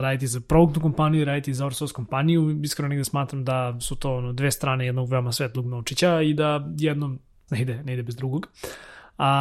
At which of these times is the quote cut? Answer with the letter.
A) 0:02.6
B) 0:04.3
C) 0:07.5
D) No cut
C